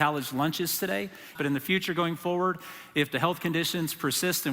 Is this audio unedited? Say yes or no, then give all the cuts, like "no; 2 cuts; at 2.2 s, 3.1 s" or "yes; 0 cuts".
no; 1 cut; at 1.3 s